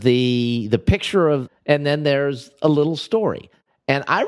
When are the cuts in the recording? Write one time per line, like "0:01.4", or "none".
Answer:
0:01.5